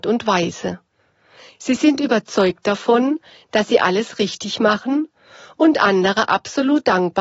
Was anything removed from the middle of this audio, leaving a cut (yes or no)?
yes